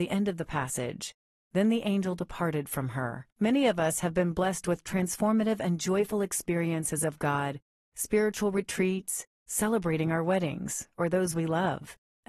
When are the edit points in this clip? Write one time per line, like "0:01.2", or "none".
0:03.3